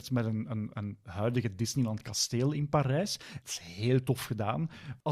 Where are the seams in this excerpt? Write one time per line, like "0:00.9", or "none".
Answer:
0:01.0